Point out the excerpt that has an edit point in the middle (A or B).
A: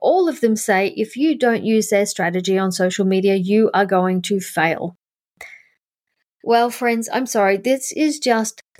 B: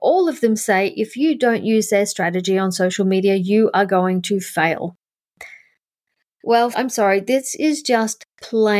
B